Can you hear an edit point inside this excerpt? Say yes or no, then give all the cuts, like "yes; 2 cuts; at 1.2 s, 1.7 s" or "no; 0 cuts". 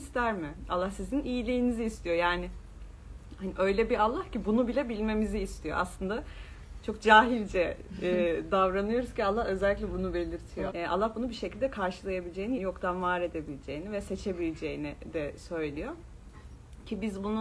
yes; 2 cuts; at 10.7 s, 12.6 s